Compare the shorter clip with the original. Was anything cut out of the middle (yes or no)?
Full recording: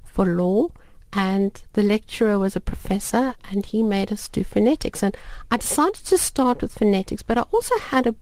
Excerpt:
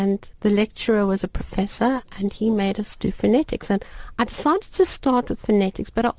no